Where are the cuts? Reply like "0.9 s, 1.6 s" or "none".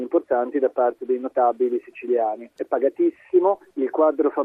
2.6 s